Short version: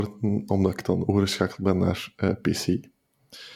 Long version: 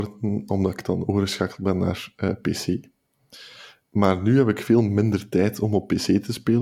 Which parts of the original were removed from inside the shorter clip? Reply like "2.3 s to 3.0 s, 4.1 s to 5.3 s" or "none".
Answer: none

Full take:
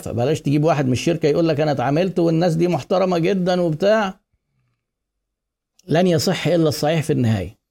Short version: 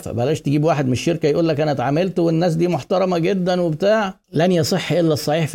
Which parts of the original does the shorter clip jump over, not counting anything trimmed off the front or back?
4.2 s to 5.8 s

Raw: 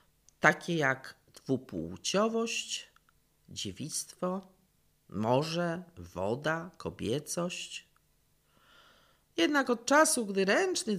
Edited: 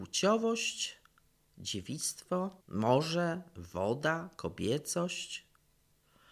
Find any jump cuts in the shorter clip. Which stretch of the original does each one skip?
4.5 s to 5.0 s

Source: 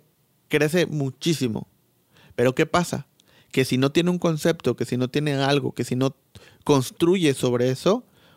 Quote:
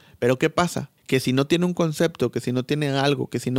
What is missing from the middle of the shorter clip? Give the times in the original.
3.1 s to 3.4 s

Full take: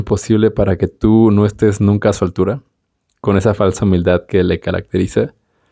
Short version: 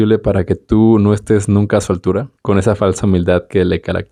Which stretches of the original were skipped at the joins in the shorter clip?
2.7 s to 3.2 s

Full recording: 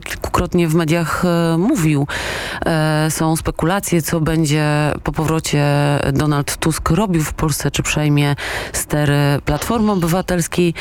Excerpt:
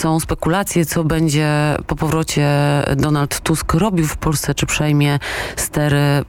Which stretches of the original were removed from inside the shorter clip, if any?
none

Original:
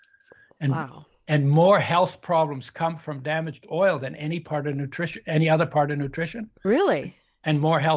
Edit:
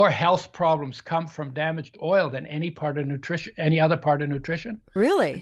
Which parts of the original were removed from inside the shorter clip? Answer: none

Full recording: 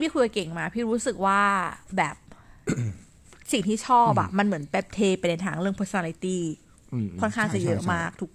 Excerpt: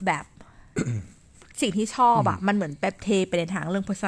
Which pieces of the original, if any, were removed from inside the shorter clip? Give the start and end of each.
none

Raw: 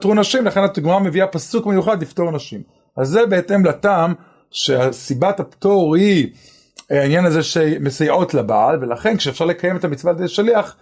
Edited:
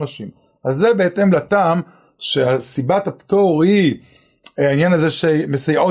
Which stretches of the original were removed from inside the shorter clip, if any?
none

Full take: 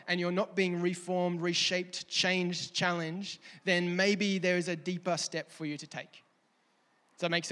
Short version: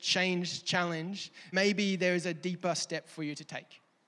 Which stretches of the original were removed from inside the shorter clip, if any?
3.6 s to 3.9 s

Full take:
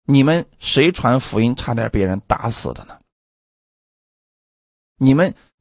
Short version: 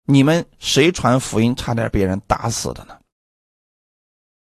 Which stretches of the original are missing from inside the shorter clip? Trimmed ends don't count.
none

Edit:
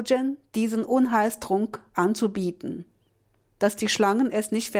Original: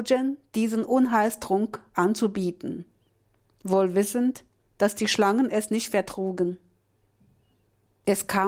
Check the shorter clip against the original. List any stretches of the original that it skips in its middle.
3.4 s to 4.6 s

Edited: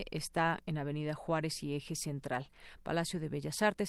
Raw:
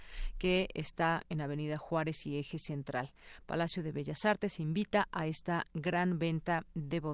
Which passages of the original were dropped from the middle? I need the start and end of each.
none

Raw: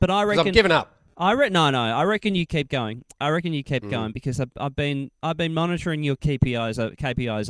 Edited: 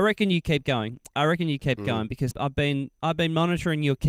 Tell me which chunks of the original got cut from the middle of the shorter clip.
4.4 s to 4.5 s

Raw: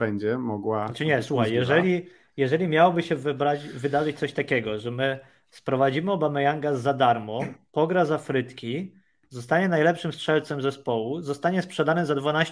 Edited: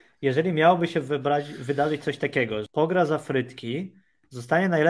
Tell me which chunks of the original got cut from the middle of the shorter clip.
4.8 s to 7.7 s

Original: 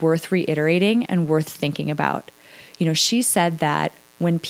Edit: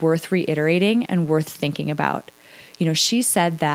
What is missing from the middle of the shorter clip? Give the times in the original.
none

